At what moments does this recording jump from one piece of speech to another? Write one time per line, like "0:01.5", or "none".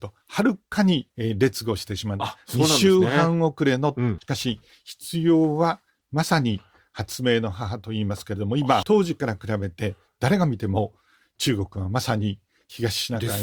0:01.1
0:04.2
0:08.8